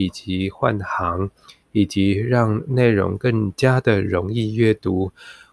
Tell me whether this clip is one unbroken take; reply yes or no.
yes